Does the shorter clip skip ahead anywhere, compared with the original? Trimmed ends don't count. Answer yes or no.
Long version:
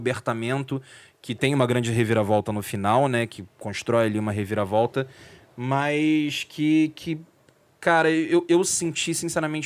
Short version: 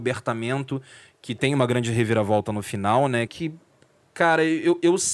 yes